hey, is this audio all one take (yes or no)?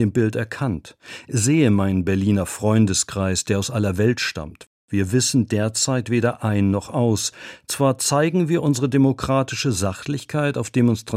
yes